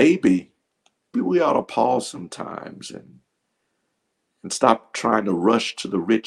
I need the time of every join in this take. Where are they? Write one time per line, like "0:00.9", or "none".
0:01.1